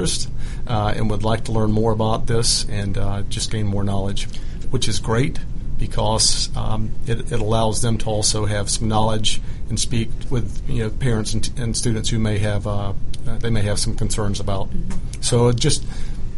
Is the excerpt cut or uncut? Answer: cut